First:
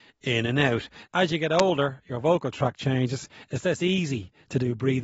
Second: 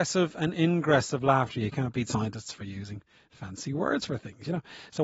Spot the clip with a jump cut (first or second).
first